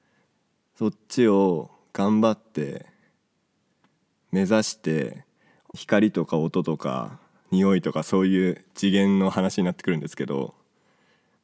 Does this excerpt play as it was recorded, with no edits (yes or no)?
no